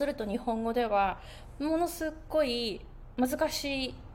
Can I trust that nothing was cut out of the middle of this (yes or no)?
yes